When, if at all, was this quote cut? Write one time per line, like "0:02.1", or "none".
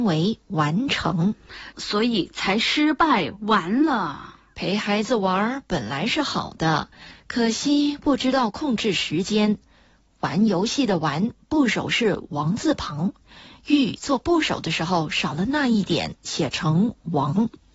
0:01.7